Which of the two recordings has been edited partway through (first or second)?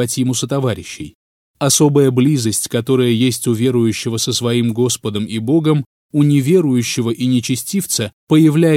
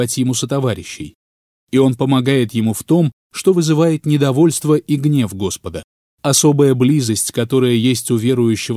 first